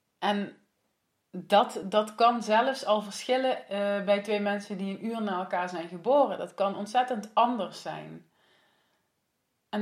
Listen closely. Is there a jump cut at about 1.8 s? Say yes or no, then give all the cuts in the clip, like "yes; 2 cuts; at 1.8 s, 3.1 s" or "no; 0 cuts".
no; 0 cuts